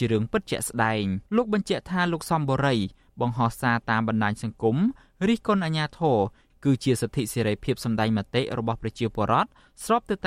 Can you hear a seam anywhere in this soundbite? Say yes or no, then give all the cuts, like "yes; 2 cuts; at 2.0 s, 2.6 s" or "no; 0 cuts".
yes; 1 cut; at 1.3 s